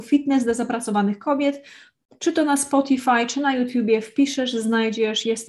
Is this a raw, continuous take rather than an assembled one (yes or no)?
yes